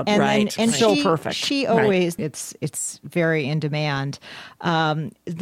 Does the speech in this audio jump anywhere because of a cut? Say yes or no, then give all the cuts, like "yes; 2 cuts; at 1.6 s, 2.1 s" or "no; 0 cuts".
yes; 1 cut; at 2.2 s